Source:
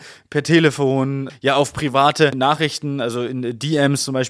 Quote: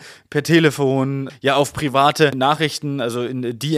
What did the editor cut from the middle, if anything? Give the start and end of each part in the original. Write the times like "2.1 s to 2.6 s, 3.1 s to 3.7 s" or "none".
none